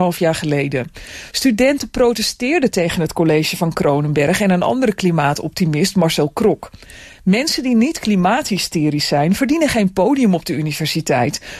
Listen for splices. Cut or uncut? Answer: uncut